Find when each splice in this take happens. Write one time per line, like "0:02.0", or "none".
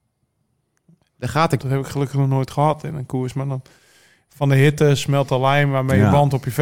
0:01.6

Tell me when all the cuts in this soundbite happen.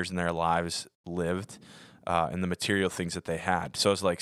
none

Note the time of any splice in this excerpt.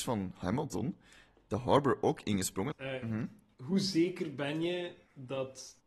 0:02.7

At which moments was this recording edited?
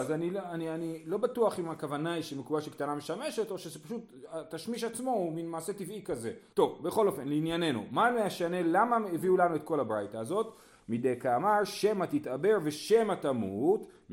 0:06.5

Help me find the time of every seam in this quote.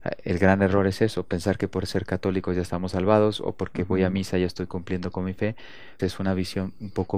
0:06.0

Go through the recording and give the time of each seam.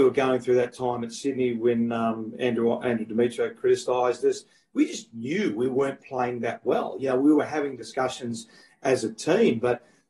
none

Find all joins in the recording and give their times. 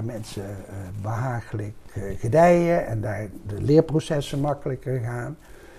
none

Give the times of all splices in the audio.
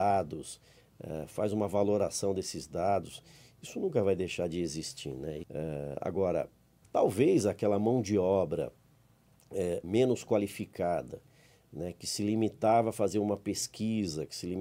0:05.4
0:06.8
0:09.8

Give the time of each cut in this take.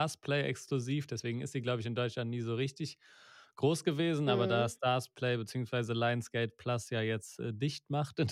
none

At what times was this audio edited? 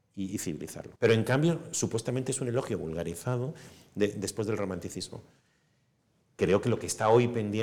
0:01.0

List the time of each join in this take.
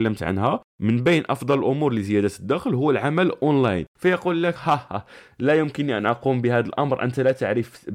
0:04.9

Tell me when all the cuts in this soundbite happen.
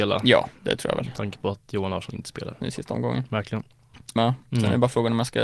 0:02.6
0:04.2

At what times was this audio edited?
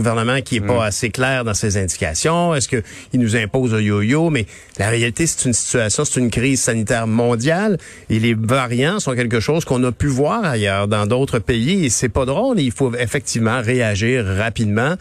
none

